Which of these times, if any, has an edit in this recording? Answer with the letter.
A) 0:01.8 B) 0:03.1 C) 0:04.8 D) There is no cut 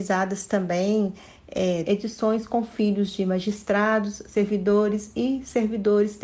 A